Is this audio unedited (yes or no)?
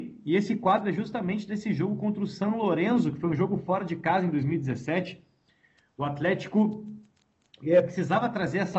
yes